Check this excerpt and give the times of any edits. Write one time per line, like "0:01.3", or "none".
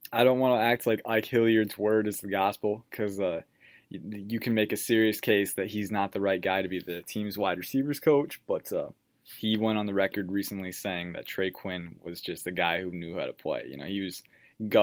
none

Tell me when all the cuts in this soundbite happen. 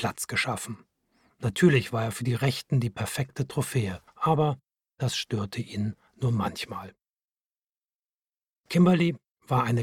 0:04.1

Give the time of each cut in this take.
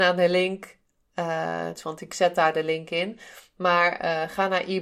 0:01.8

